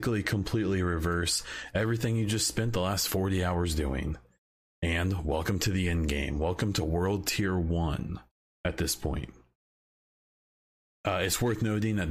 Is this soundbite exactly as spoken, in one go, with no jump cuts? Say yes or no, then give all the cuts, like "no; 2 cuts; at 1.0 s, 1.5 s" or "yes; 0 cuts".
yes; 0 cuts